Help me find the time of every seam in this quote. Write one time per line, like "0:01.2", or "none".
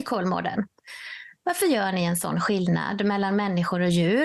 0:01.4